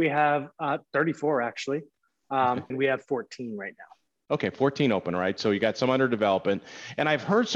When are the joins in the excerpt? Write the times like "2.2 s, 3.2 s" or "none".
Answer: 2.7 s